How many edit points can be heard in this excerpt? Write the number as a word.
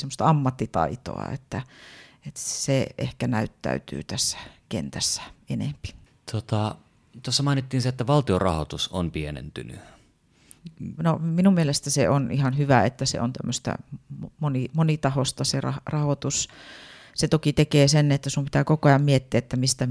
one